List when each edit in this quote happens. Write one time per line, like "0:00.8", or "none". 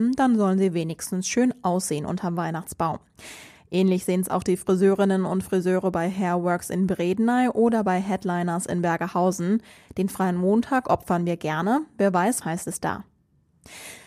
0:12.4